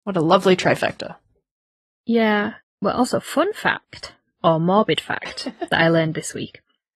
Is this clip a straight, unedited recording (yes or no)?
yes